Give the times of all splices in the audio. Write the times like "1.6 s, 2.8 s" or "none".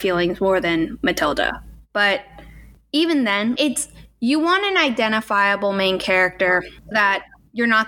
3.6 s, 6.9 s